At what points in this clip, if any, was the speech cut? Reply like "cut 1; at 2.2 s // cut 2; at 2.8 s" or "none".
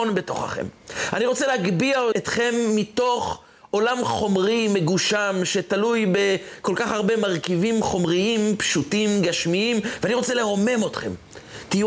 cut 1; at 2.1 s